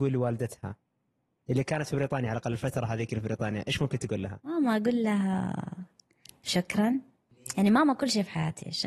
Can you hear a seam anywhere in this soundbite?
no; 0 cuts

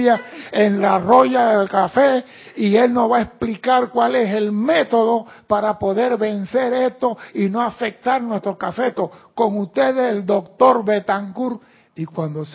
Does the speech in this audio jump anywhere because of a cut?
no; 0 cuts

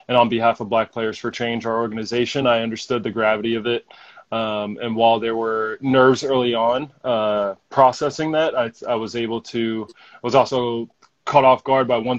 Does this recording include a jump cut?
no; 0 cuts

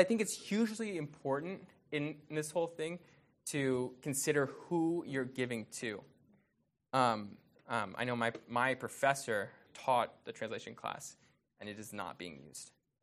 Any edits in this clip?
yes; 3 cuts; at 7.6 s, 9.7 s, 11.4 s

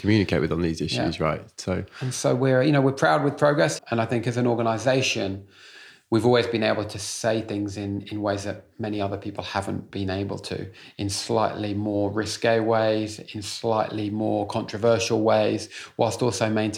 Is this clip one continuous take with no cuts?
no; 1 cut; at 3.8 s

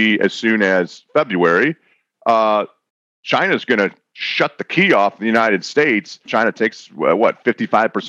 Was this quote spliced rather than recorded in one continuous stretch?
yes; 1 cut; at 6.3 s

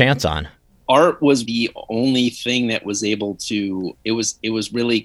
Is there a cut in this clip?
yes; 2 cuts; at 1.5 s, 4.0 s

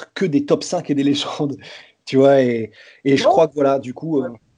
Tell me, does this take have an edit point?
no; 0 cuts

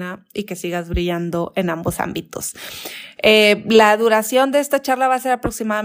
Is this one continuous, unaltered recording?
yes; 0 cuts

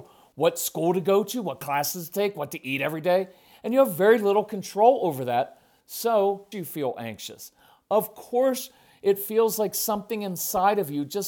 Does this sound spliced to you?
yes; 1 cut; at 6.5 s

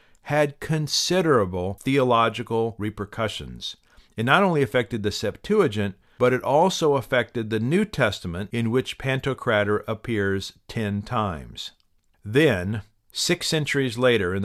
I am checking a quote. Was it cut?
no; 0 cuts

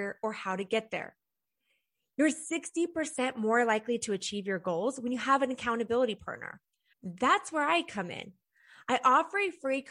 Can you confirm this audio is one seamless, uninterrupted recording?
no; 1 cut; at 6.9 s

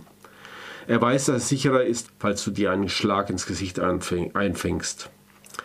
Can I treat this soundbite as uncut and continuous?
no; 1 cut; at 2.0 s

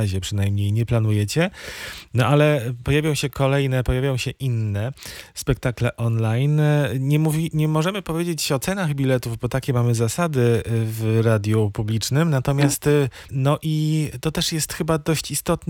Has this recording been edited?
yes; 1 cut; at 13.3 s

